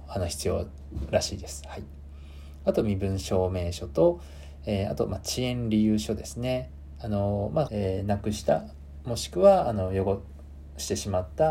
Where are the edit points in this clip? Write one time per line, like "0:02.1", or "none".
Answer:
0:07.7